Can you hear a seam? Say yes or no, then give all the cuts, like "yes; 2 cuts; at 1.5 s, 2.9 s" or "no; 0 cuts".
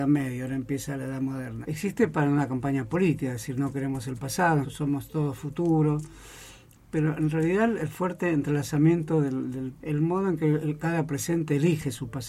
yes; 3 cuts; at 1.6 s, 4.6 s, 9.8 s